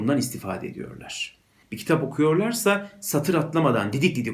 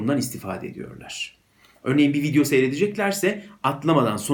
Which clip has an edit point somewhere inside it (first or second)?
first